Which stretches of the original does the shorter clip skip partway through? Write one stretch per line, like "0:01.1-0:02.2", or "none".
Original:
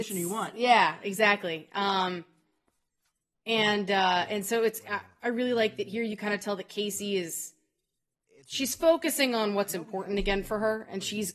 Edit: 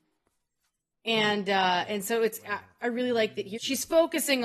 0:06.0-0:08.4